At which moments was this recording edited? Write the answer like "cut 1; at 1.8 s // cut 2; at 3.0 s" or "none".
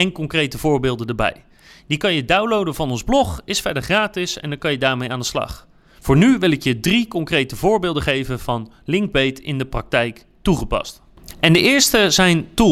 none